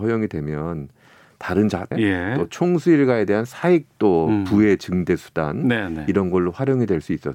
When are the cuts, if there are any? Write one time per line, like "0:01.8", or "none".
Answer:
0:01.9